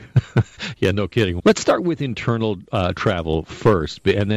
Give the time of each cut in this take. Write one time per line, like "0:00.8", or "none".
0:01.4